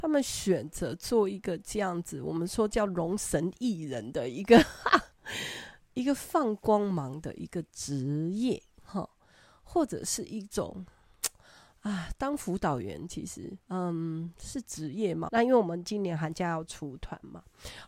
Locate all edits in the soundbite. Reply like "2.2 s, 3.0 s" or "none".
13.6 s, 15.3 s